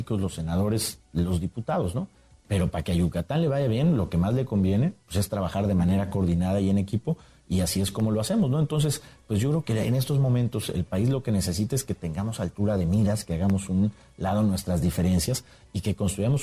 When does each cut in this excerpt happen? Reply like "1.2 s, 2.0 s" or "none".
none